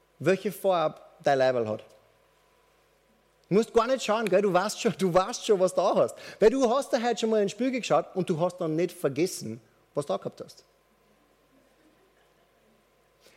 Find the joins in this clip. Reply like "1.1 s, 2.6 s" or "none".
none